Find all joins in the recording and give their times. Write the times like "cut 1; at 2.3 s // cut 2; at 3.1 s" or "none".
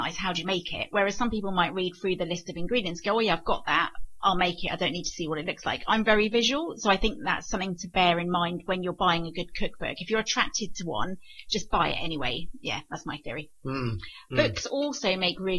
none